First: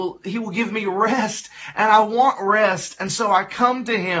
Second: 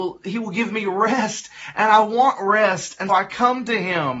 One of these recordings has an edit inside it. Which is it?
second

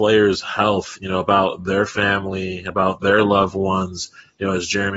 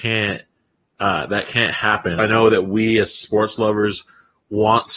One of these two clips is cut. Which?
second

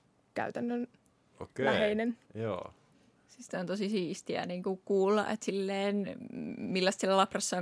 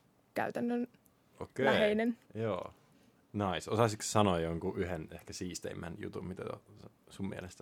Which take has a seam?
second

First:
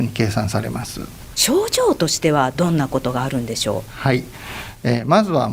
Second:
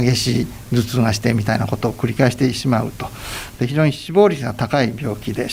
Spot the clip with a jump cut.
first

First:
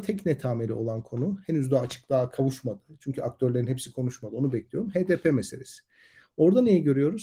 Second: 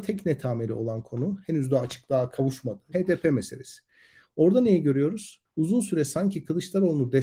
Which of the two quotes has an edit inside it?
second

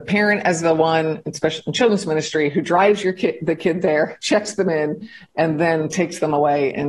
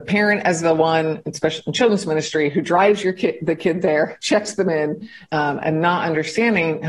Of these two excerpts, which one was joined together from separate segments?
second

